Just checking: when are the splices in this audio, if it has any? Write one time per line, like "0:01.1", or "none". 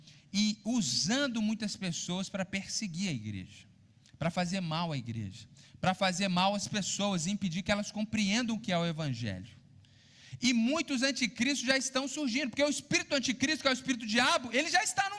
none